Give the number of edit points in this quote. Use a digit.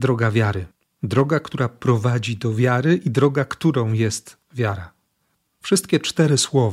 0